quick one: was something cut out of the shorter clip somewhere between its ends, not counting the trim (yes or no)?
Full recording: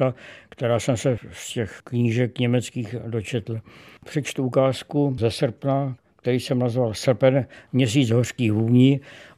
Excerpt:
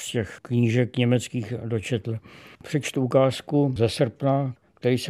no